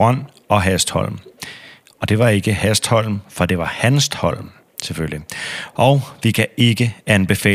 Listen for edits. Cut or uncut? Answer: cut